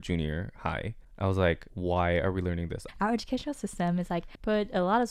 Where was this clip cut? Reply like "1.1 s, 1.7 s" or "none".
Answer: 2.9 s